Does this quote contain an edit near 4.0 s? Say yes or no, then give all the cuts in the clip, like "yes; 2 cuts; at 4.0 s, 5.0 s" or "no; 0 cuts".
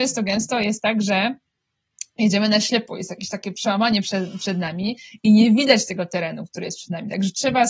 no; 0 cuts